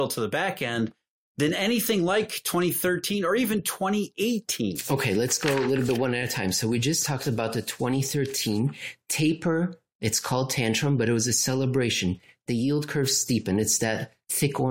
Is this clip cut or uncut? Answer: uncut